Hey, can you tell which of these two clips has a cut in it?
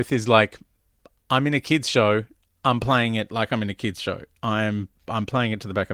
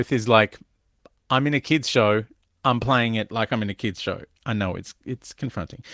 second; 1 cut; at 4.4 s

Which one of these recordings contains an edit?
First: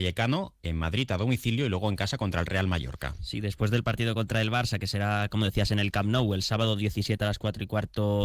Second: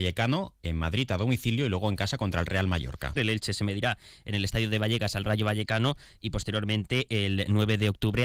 second; 1 cut; at 3.2 s

